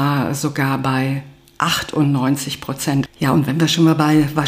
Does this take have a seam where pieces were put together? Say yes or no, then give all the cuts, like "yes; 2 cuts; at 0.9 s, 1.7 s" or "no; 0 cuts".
yes; 1 cut; at 3.1 s